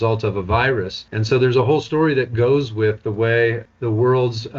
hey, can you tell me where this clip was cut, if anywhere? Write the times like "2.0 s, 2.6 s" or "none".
1.1 s